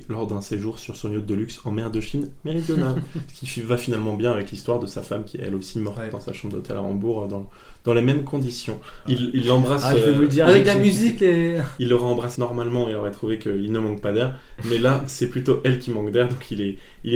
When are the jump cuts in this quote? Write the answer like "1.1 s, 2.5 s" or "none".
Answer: 9.1 s, 12.4 s